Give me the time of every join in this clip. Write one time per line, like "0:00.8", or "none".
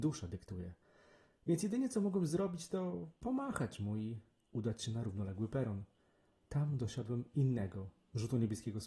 none